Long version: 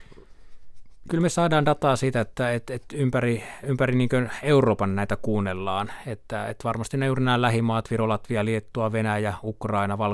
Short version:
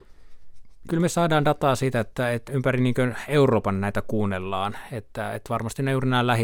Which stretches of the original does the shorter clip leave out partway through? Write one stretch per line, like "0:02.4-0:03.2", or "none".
0:02.7-0:03.6